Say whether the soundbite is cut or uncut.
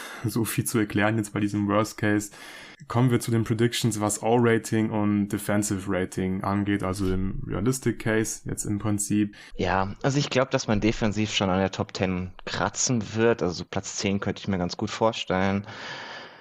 cut